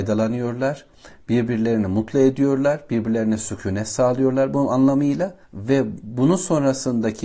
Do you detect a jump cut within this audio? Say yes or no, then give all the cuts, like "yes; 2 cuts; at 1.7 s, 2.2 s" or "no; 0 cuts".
yes; 1 cut; at 5.4 s